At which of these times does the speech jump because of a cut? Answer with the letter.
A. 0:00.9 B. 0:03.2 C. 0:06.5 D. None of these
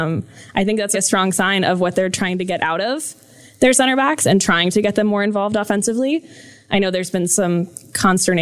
A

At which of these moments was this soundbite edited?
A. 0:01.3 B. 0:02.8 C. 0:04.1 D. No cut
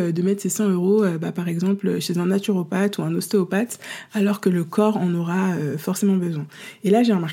D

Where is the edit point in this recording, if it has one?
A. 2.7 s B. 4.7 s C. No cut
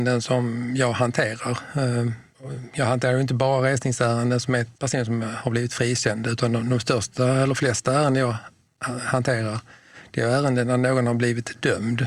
B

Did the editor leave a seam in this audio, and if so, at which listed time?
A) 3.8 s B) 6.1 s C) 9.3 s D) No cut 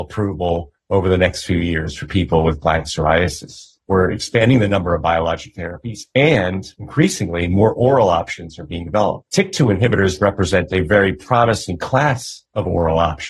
A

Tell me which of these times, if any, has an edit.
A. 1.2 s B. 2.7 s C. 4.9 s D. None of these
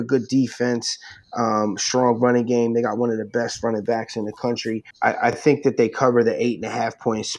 C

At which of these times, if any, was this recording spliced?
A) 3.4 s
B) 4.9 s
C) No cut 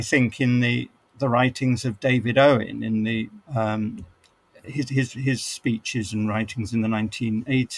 A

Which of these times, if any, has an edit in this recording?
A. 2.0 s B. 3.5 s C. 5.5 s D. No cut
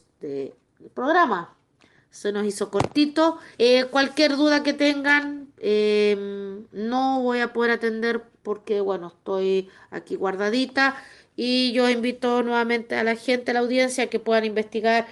B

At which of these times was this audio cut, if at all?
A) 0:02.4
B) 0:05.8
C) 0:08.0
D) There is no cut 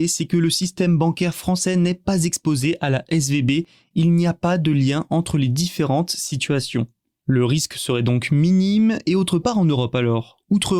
D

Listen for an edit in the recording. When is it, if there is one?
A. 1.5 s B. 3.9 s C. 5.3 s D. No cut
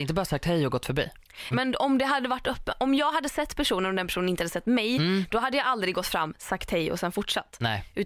A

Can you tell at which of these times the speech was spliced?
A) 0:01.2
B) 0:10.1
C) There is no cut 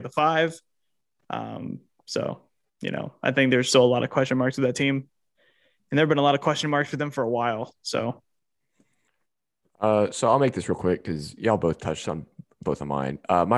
C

